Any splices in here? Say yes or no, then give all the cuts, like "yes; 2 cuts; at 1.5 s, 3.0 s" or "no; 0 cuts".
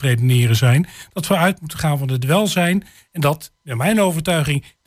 no; 0 cuts